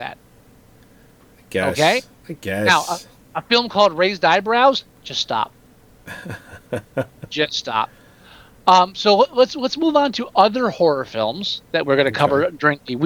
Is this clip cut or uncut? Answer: uncut